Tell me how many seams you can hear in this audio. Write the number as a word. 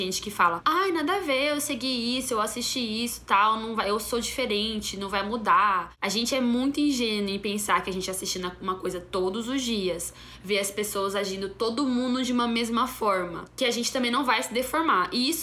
zero